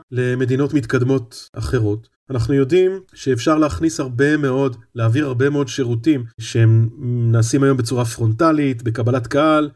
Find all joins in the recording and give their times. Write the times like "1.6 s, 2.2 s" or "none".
none